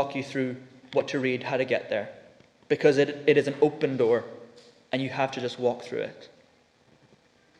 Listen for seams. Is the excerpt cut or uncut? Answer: uncut